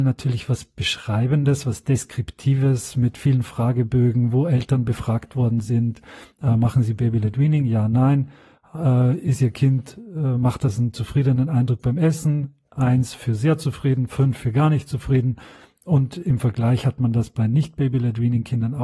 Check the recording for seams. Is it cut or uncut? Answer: uncut